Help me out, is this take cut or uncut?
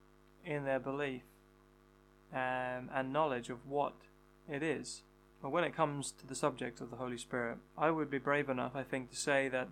cut